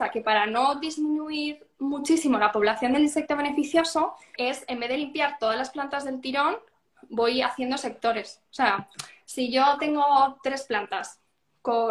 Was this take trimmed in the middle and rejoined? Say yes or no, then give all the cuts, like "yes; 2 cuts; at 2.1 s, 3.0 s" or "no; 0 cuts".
yes; 1 cut; at 4.4 s